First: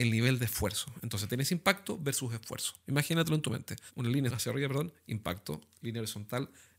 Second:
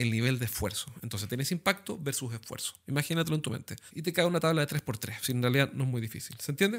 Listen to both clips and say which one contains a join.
second; 1 cut; at 3.9 s

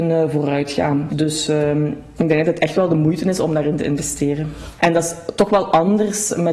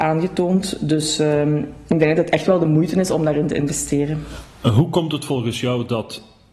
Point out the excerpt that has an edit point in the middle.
first; 2 cuts; at 1.1 s, 4.8 s

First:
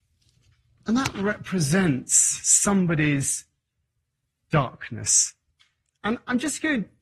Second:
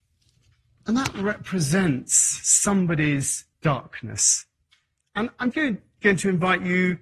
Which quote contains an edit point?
second; 2 cuts; at 3.5 s, 5.5 s

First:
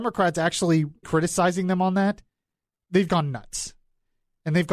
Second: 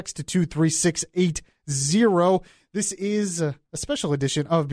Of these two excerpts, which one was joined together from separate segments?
first; 2 cuts; at 1.0 s, 3.1 s

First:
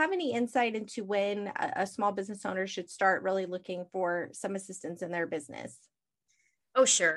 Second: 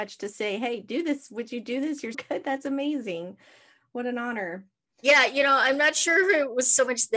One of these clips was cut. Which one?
second; 1 cut; at 2.1 s

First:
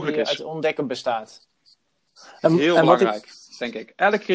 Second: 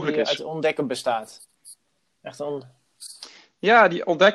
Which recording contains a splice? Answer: first; 1 cut; at 2.1 s

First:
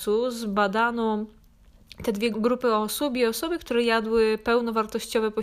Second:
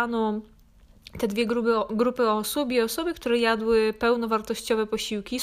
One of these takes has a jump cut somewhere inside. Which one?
first; 1 cut; at 2.3 s

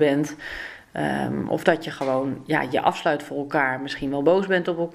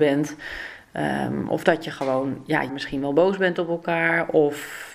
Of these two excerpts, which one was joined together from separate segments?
second; 1 cut; at 2.7 s

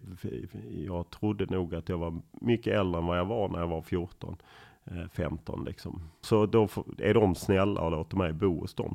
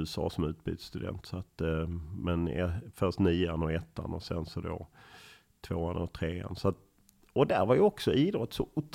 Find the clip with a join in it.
first; 1 cut; at 6.2 s

